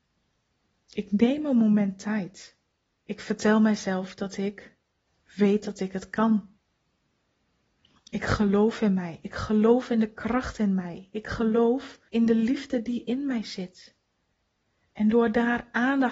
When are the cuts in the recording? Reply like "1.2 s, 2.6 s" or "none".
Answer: 3.0 s, 12.1 s